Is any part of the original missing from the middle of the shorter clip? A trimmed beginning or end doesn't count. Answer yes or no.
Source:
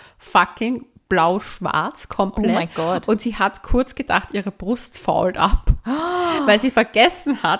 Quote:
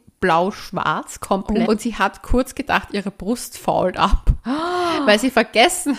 yes